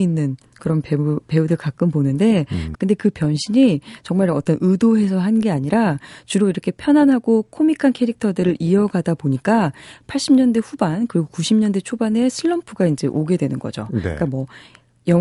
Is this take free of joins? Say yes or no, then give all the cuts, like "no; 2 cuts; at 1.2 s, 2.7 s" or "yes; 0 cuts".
no; 1 cut; at 2.7 s